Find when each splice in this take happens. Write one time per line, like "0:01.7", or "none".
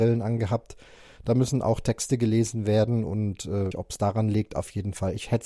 0:03.7